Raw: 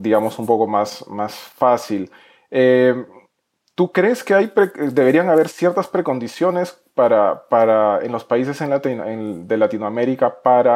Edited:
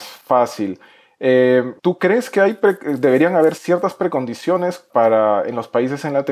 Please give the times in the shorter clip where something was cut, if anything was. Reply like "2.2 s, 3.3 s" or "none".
1.8 s, 4.9 s